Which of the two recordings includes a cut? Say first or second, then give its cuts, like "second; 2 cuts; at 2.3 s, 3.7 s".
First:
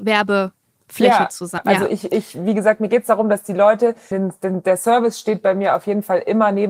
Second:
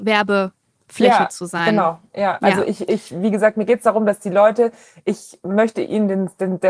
first; 2 cuts; at 1.6 s, 4.1 s